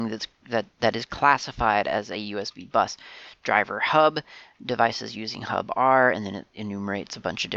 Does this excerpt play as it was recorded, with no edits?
yes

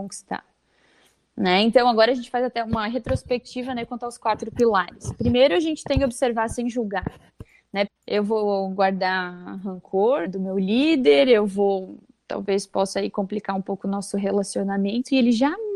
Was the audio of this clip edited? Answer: yes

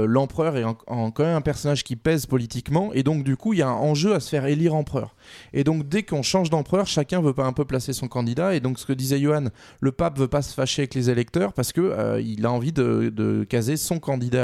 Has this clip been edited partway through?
no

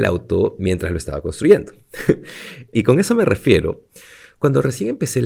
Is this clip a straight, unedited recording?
no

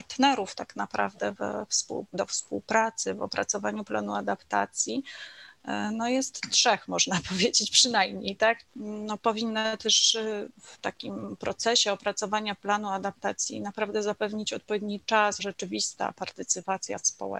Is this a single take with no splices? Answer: no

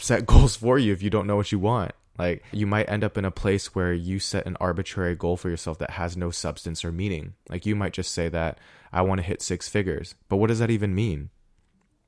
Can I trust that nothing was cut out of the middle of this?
no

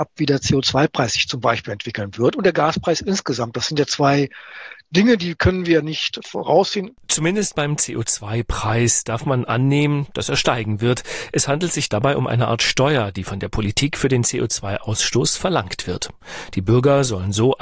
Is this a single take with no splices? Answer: yes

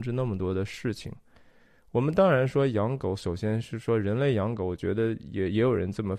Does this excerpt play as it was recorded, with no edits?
yes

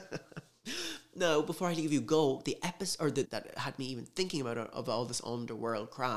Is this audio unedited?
no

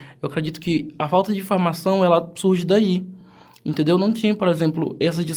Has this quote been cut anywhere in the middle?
no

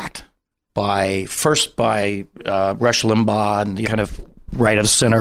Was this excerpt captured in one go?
no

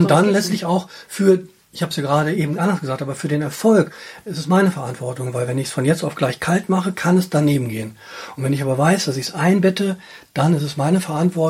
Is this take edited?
no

